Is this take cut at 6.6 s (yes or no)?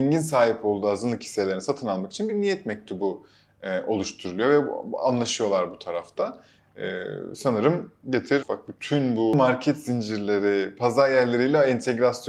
no